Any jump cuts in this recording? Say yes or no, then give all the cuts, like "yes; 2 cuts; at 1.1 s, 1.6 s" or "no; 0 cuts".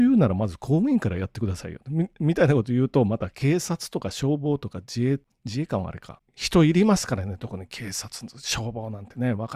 no; 0 cuts